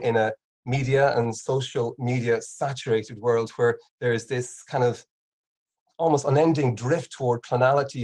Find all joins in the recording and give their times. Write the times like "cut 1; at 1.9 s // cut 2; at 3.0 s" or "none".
cut 1; at 3.9 s